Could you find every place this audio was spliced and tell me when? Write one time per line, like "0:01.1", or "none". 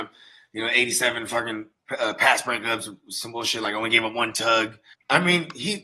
0:04.9